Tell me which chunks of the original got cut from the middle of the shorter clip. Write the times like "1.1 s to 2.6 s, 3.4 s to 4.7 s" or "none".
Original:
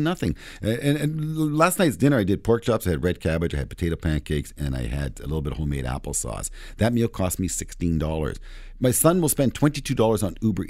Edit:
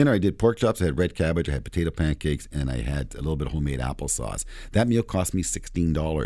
none